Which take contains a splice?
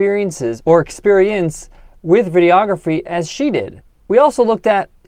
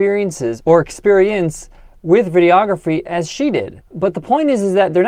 second; 1 cut; at 3.9 s

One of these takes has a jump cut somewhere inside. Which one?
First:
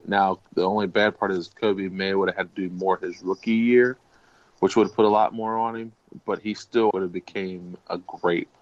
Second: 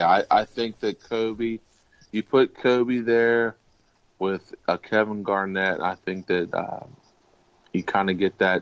first; 1 cut; at 6.9 s

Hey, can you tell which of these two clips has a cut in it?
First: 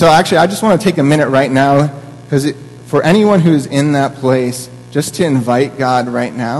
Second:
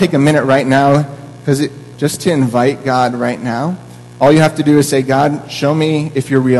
second; 1 cut; at 2.0 s

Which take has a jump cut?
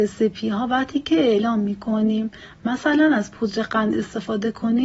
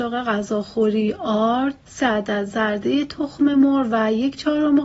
second; 1 cut; at 1.8 s

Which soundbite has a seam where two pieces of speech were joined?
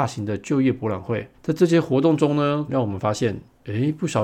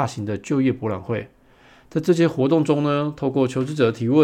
first; 2 cuts; at 1.3 s, 2.7 s

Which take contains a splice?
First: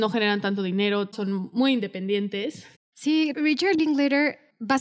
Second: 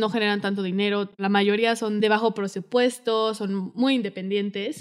first; 2 cuts; at 1.1 s, 2.7 s

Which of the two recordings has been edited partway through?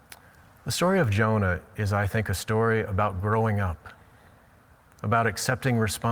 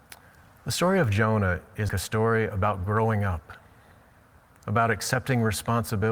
second; 1 cut; at 1.9 s

